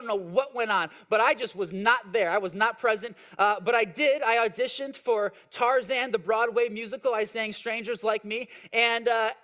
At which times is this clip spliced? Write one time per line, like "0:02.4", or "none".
none